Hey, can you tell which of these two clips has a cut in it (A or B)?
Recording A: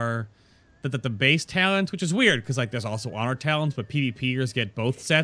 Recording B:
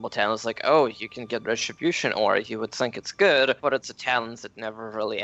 B